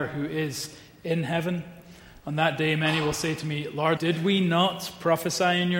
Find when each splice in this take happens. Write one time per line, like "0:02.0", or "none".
0:04.0

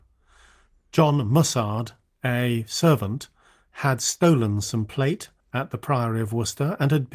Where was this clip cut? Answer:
0:05.4

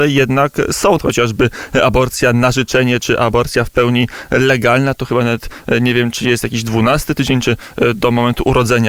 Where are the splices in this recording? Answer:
0:01.0

